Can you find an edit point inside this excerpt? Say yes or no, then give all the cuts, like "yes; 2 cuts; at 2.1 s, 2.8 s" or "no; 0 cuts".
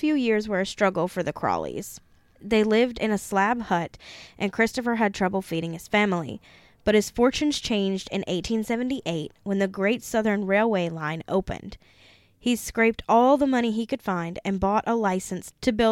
no; 0 cuts